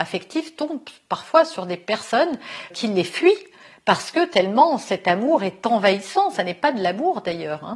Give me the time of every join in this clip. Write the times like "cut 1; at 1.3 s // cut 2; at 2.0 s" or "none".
cut 1; at 2.7 s